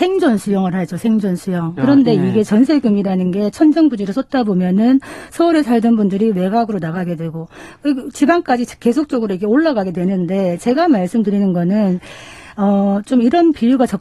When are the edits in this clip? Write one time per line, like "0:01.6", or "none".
0:01.8